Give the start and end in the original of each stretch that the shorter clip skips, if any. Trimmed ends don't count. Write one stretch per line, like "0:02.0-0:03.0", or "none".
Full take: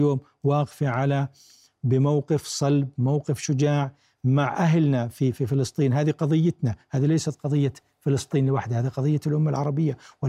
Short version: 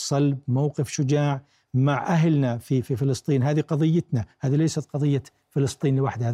none